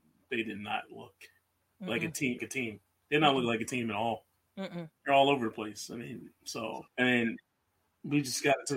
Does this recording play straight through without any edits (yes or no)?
no